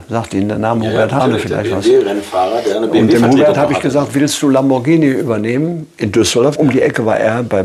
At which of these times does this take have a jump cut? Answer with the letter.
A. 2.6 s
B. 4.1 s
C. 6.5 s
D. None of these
C